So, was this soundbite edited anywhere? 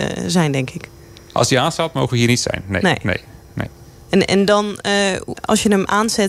yes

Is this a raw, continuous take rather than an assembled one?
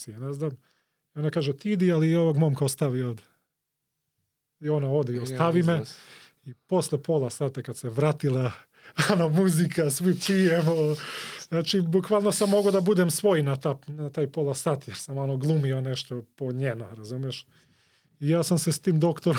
yes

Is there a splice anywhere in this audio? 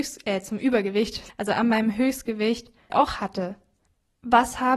yes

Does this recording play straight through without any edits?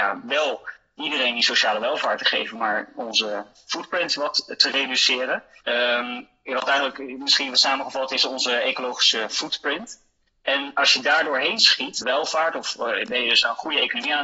no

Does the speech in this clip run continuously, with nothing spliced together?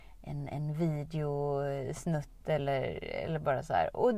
yes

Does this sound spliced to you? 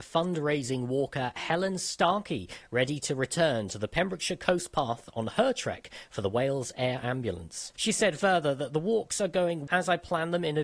yes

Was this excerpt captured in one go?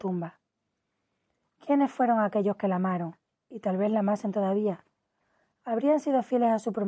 yes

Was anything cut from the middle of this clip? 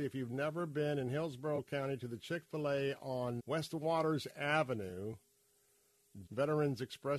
yes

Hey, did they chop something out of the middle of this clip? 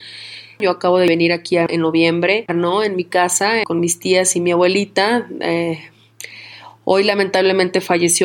yes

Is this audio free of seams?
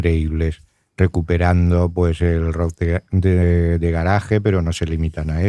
yes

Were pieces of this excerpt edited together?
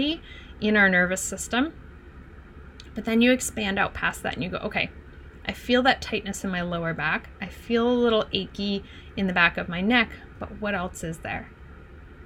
no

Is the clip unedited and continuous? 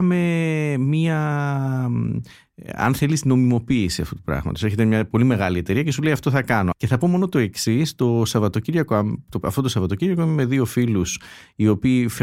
no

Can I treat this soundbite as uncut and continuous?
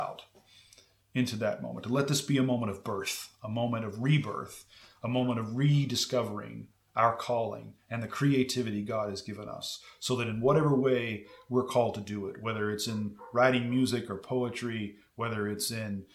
yes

